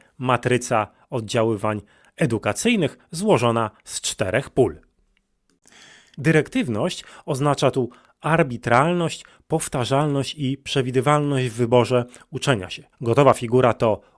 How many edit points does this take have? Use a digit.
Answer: 2